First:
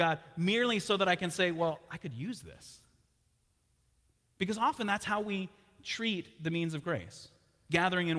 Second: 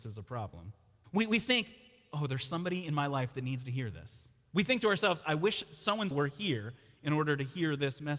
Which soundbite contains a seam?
second; 2 cuts; at 1.0 s, 6.1 s

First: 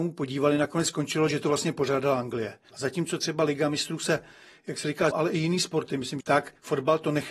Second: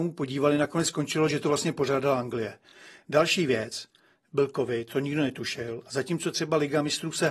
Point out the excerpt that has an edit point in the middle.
first; 3 cuts; at 2.7 s, 5.1 s, 6.2 s

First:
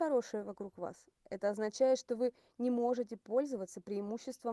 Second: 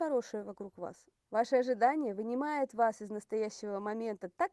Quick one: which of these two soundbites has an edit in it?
second; 1 cut; at 1.2 s

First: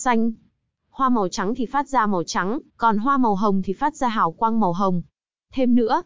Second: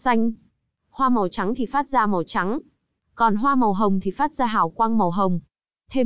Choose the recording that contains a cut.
first; 1 cut; at 2.7 s

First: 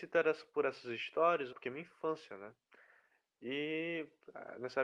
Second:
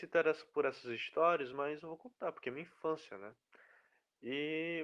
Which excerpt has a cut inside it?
first; 1 cut; at 1.5 s

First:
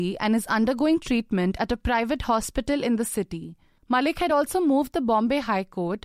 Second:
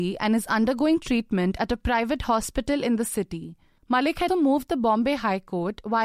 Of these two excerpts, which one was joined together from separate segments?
second; 1 cut; at 4.3 s

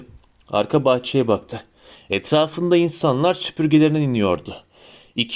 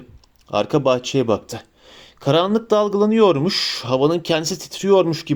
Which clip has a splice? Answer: first; 1 cut; at 1.9 s

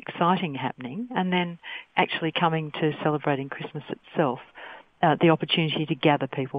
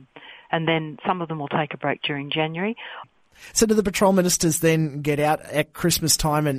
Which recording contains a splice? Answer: second; 1 cut; at 3.0 s

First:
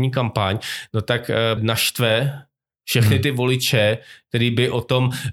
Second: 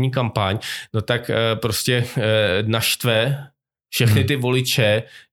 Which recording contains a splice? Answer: first; 1 cut; at 1.6 s

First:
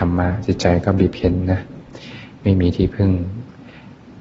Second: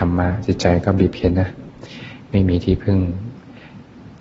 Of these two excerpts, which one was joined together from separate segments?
second; 1 cut; at 1.3 s

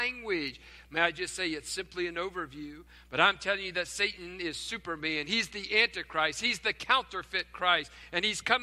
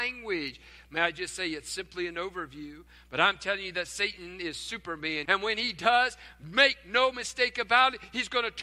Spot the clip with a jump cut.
second; 1 cut; at 5.3 s

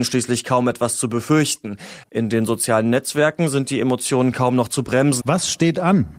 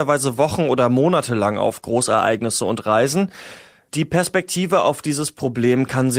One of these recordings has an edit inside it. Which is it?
first; 2 cuts; at 2.0 s, 5.2 s

